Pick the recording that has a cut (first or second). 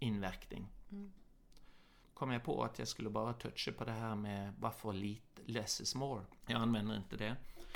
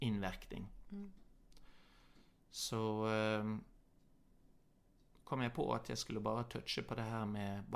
first